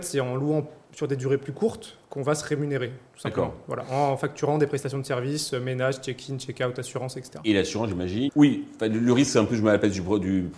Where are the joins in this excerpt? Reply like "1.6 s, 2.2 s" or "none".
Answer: 8.3 s

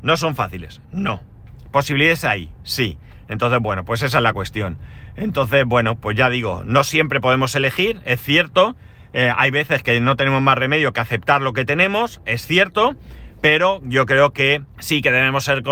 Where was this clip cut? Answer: 14.7 s

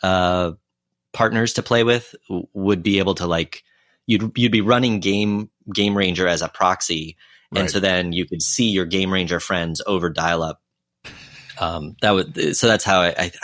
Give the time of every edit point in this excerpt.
none

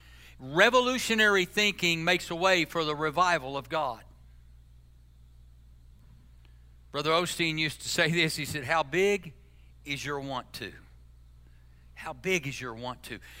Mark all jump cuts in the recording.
none

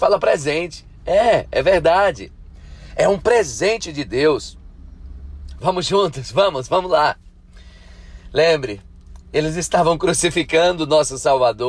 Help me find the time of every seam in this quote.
5.6 s

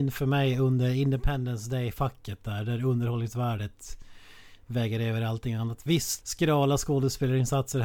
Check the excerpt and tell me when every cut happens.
6.2 s

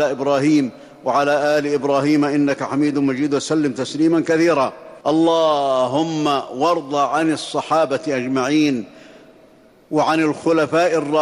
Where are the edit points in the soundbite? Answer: 5.0 s

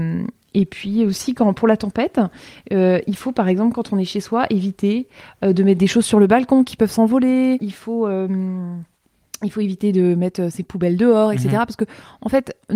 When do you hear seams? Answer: 7.6 s

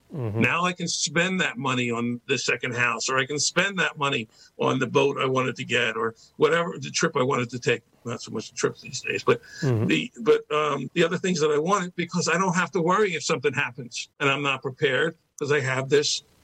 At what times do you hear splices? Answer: 10.9 s, 14.1 s

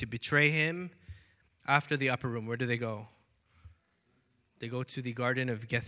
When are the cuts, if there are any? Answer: 1.5 s

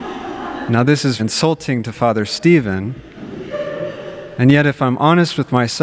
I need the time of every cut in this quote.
1.2 s

